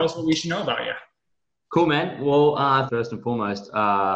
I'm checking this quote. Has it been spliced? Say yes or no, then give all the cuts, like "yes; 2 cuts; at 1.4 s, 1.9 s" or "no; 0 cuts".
yes; 1 cut; at 2.9 s